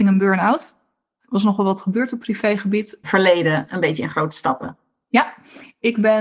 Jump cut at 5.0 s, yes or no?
no